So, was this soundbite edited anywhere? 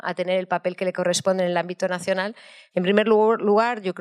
yes; 1 cut; at 2.7 s

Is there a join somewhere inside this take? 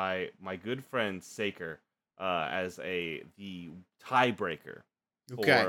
no; 0 cuts

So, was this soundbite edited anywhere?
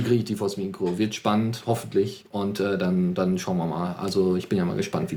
no; 0 cuts

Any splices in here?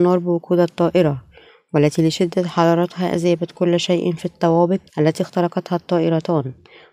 yes; 1 cut; at 4.9 s

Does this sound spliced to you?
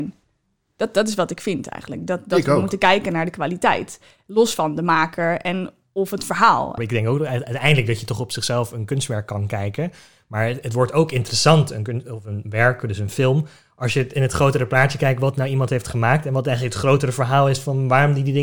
yes; 1 cut; at 6.8 s

